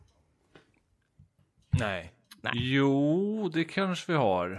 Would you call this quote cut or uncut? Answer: uncut